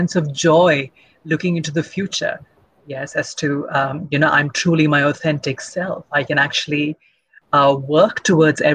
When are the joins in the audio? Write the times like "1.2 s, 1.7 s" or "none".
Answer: none